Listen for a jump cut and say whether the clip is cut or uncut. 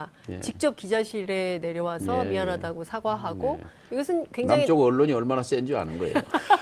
uncut